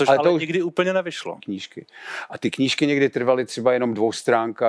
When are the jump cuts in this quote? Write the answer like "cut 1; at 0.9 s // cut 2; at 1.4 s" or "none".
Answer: cut 1; at 1.4 s